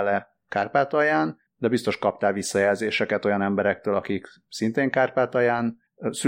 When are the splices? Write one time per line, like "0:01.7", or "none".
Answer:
none